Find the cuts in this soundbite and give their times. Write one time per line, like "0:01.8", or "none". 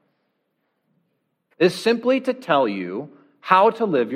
0:01.5